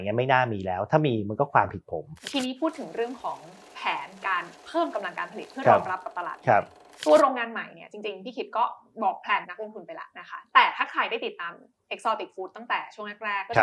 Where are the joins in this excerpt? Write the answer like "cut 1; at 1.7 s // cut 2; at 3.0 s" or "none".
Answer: cut 1; at 9.4 s